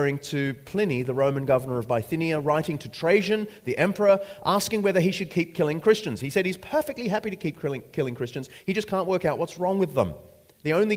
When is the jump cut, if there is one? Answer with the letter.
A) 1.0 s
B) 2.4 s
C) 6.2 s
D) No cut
D